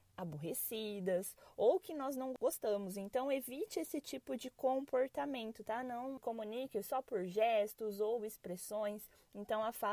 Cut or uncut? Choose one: uncut